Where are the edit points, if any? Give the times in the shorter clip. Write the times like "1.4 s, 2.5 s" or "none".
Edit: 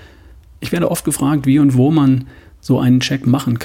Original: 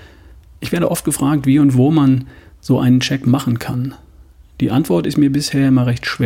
none